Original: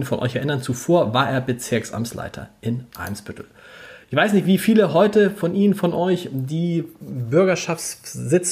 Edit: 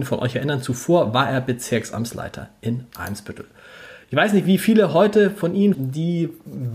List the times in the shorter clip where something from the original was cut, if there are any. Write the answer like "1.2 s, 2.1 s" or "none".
5.7 s